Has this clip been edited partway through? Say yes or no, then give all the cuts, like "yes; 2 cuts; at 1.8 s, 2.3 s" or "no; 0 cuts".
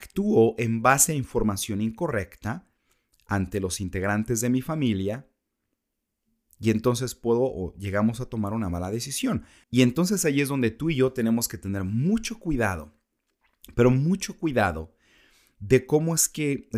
yes; 1 cut; at 9.6 s